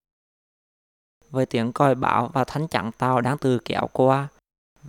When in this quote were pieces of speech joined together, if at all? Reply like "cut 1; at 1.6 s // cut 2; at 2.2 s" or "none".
cut 1; at 1.2 s // cut 2; at 3.4 s